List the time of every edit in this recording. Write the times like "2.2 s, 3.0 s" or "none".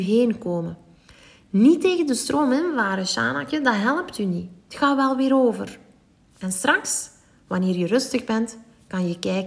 none